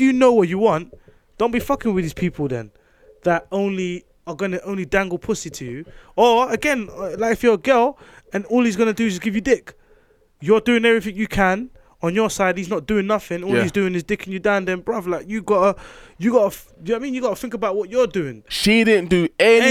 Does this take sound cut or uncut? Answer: cut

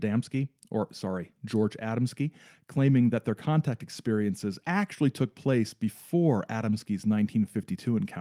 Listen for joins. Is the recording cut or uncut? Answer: uncut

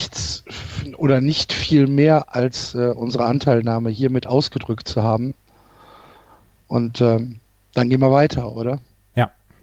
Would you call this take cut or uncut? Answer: uncut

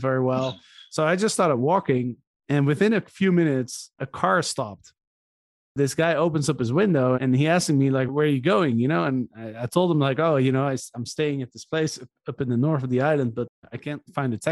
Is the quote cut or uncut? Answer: cut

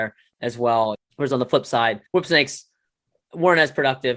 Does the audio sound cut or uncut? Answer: cut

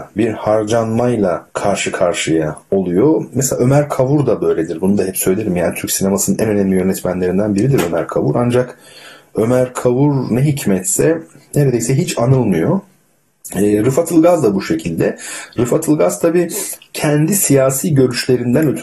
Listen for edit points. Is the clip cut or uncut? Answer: cut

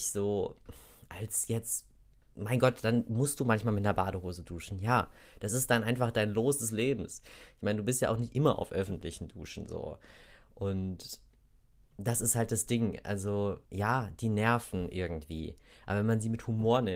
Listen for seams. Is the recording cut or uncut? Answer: cut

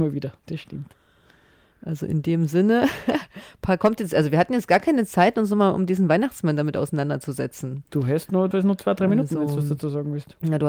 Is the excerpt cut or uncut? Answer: cut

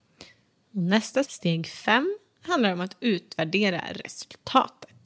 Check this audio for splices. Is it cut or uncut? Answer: cut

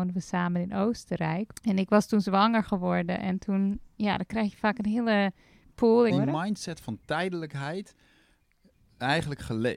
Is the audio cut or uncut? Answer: cut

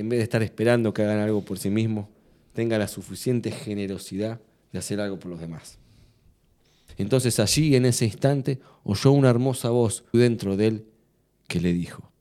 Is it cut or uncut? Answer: cut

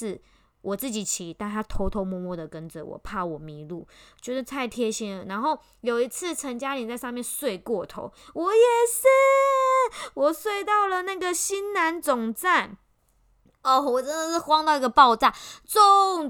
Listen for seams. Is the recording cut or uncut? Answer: uncut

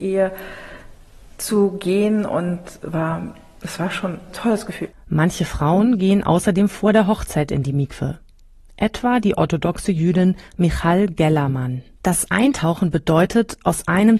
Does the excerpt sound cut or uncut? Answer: cut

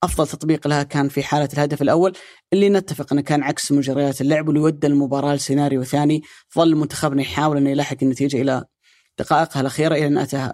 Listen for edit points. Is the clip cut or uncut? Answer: uncut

